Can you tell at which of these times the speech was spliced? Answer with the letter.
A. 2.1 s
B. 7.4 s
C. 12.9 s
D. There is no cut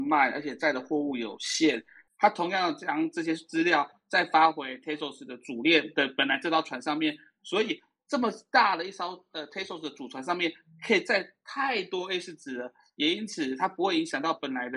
A